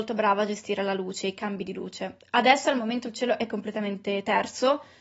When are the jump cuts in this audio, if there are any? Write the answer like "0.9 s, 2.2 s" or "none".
none

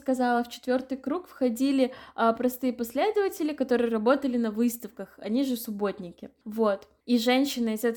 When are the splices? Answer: none

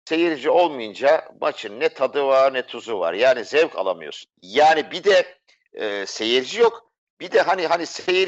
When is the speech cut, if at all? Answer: 4.3 s

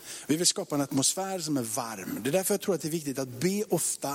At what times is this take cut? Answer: none

